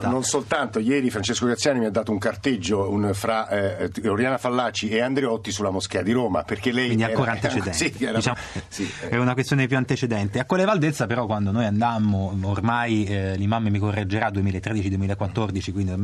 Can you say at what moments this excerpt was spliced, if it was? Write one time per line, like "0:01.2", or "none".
0:08.3